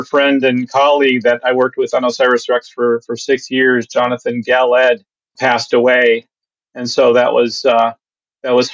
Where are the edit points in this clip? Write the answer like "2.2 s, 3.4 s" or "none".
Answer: 5.4 s

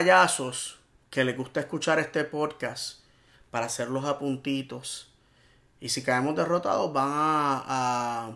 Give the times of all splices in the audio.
none

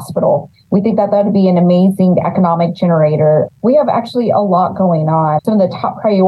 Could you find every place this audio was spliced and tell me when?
3.5 s, 5.4 s

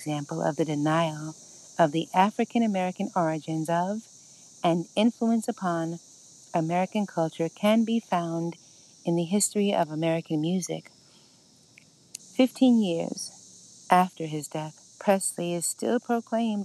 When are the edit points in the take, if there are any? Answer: 12.2 s, 14.9 s

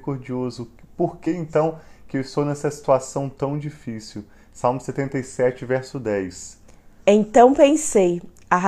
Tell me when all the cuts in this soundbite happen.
none

